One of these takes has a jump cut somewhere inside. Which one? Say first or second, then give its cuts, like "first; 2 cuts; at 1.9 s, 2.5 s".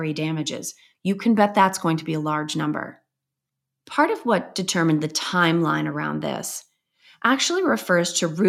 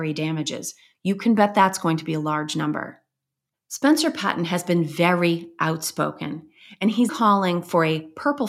second; 2 cuts; at 3.5 s, 7.1 s